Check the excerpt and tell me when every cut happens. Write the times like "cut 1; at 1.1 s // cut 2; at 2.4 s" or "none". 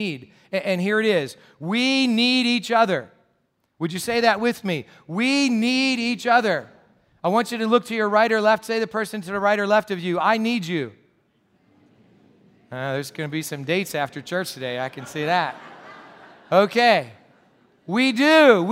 none